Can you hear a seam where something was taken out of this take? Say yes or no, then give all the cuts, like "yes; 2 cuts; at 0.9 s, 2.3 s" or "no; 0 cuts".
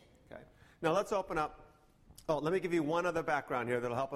no; 0 cuts